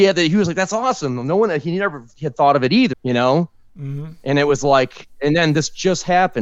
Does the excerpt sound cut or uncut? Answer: cut